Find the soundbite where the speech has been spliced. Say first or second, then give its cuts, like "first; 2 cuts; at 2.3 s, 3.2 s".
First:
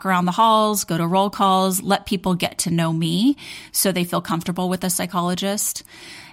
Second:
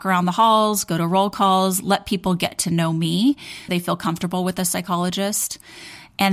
second; 1 cut; at 3.7 s